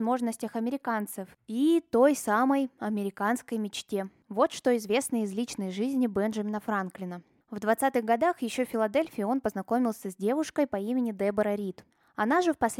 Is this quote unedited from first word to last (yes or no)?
yes